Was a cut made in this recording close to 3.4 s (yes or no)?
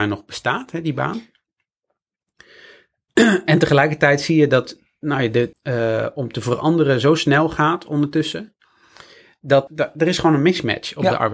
no